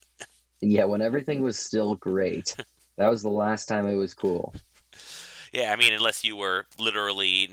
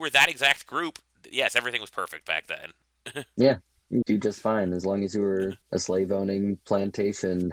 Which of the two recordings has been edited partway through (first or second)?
second